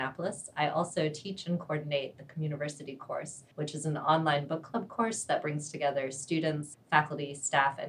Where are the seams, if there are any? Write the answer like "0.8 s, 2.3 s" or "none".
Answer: 3.5 s, 6.7 s